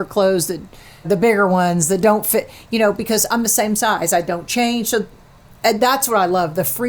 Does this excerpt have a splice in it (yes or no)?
yes